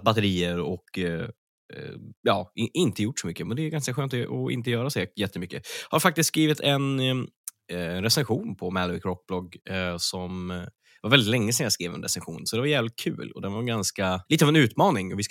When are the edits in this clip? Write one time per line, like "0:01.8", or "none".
0:14.3

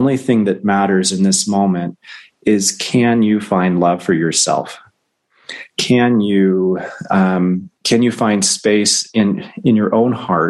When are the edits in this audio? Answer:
0:07.8

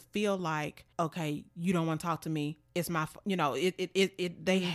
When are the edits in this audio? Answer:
0:00.9

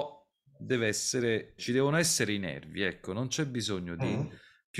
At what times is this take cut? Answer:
0:01.6

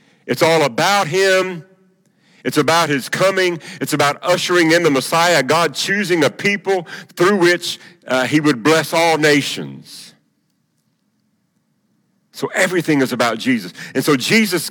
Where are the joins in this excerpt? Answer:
0:07.1

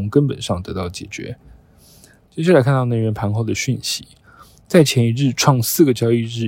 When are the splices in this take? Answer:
0:02.3

